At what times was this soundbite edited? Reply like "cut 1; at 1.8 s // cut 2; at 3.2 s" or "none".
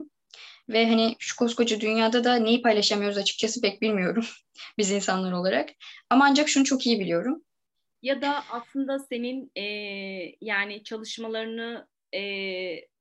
cut 1; at 7.9 s